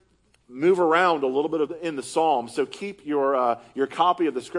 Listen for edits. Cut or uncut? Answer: uncut